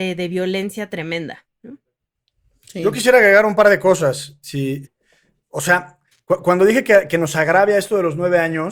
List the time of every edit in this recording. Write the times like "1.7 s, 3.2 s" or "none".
4.8 s